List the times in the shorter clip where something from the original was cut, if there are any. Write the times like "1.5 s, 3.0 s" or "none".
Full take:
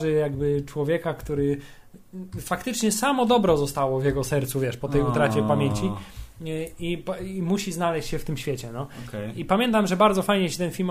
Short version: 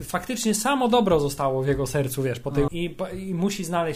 2.7 s